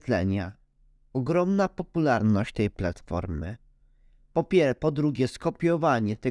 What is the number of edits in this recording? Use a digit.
0